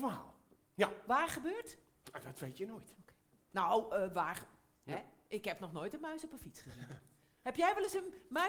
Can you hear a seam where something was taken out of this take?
yes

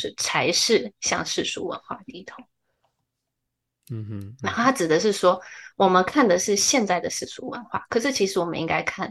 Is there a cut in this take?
no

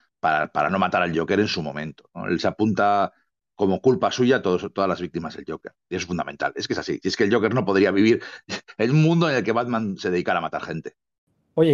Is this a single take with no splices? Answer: yes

